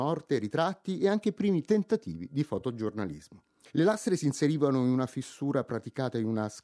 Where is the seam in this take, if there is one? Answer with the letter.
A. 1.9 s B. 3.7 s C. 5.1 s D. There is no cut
B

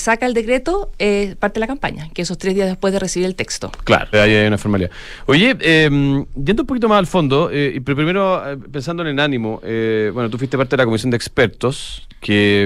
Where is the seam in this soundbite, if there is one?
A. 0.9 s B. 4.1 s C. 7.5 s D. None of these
B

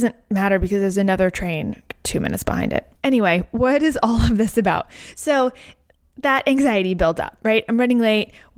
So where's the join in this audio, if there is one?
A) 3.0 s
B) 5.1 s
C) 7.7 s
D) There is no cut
A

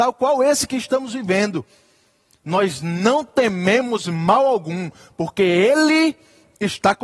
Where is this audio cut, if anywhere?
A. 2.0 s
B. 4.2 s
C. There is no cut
C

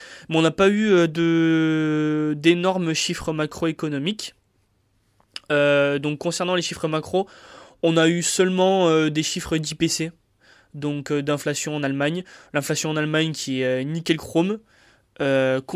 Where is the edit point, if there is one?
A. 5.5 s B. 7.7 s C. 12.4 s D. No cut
D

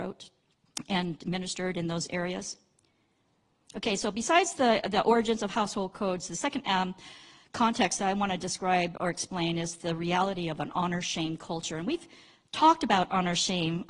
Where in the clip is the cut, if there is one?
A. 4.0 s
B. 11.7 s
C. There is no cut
C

